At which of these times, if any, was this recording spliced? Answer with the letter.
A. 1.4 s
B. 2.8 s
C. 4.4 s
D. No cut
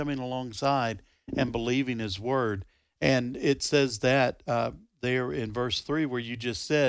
D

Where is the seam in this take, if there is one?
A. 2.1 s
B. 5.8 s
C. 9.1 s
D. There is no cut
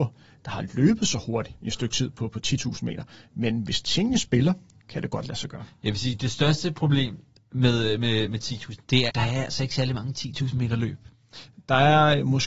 C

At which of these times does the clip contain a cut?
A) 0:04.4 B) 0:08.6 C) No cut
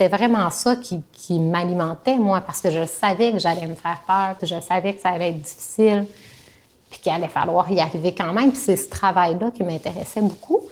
A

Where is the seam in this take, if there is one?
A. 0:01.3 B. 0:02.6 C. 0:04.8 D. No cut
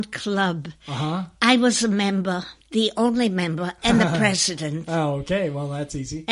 B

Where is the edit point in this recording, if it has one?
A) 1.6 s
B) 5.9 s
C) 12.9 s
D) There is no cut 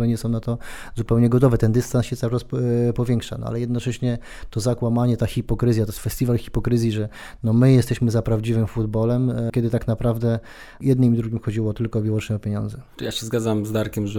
D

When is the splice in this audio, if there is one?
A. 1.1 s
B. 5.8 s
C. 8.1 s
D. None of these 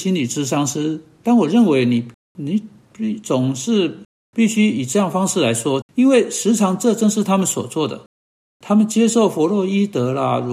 B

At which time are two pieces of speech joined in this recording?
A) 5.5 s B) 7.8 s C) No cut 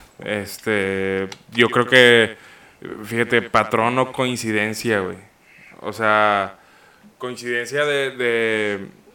C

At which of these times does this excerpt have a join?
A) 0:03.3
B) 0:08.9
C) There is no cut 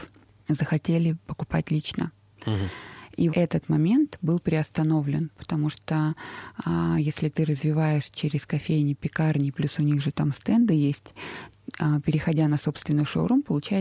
A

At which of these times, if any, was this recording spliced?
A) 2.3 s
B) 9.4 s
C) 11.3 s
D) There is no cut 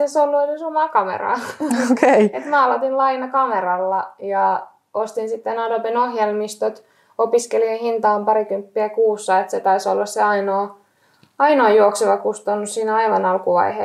D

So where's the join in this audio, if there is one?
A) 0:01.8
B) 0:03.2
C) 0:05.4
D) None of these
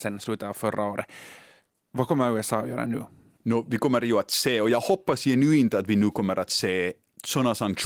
D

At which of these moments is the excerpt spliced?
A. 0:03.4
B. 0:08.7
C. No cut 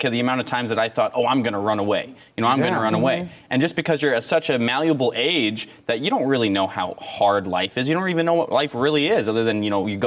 C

